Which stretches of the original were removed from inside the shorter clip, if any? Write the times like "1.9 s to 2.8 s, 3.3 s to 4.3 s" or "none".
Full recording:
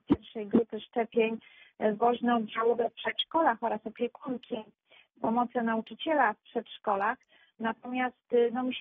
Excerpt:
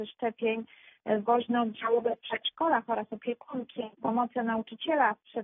4.7 s to 5.1 s